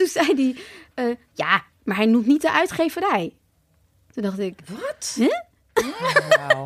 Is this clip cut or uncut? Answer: uncut